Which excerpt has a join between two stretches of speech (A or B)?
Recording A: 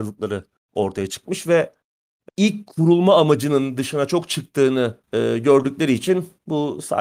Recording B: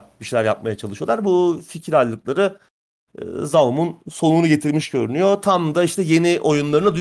A